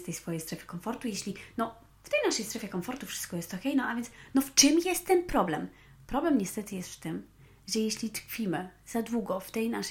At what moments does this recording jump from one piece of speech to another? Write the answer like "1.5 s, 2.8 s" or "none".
none